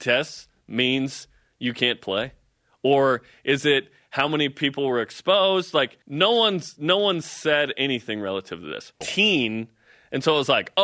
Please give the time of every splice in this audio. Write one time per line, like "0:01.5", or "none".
0:06.0
0:09.0